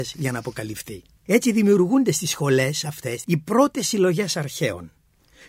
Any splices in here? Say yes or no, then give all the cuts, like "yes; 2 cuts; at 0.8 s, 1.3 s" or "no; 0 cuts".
yes; 2 cuts; at 1.3 s, 3.2 s